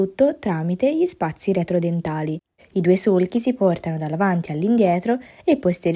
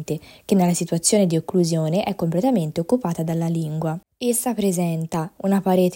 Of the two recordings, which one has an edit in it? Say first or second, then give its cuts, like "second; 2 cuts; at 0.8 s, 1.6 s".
first; 1 cut; at 2.6 s